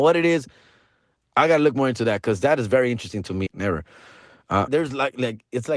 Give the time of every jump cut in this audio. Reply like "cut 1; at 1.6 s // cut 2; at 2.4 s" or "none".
cut 1; at 3.5 s // cut 2; at 4.7 s